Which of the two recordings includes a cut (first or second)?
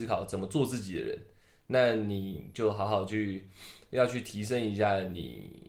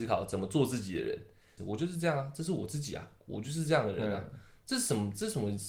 second